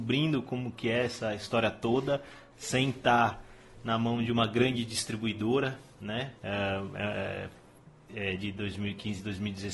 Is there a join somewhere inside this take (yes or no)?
yes